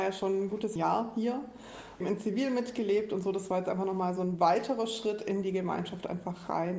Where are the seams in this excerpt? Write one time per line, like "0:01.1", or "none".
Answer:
0:02.0